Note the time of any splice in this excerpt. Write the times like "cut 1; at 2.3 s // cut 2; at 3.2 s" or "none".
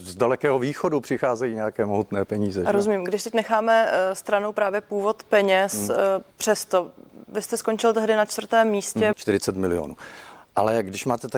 cut 1; at 6.3 s // cut 2; at 9.1 s